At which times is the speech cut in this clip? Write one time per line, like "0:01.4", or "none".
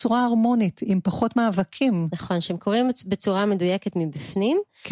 none

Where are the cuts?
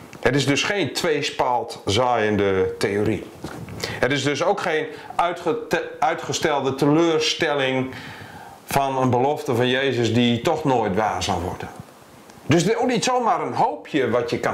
0:12.3

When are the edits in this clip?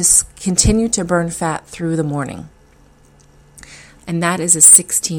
0:04.0

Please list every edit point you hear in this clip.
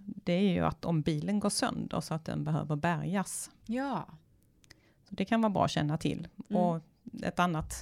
0:03.6

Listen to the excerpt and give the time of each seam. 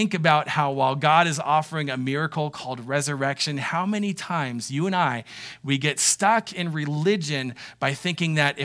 none

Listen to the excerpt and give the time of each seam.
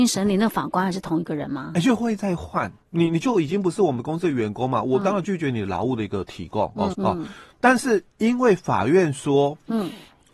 0:02.8
0:06.9

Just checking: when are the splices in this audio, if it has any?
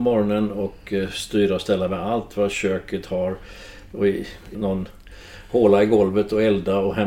0:04.5

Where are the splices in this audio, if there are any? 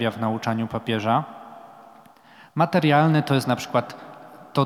none

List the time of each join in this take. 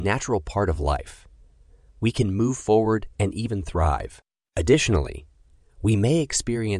0:04.4

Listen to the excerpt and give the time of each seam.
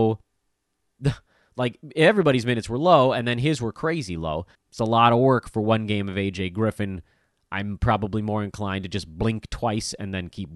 0:04.5

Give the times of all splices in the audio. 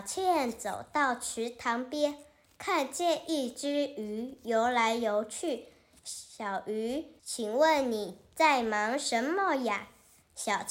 0:07.2

